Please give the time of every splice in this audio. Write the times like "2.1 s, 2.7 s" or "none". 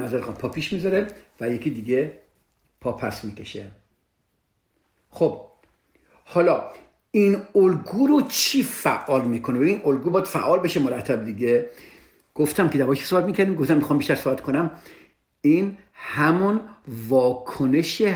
none